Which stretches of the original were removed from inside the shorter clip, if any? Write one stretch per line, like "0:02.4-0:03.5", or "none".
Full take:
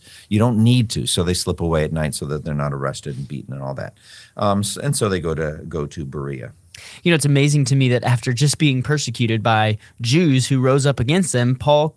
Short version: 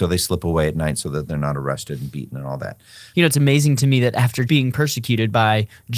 0:04.3-0:07.0
0:08.4-0:08.6